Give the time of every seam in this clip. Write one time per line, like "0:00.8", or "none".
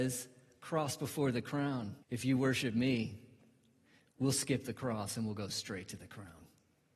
0:02.0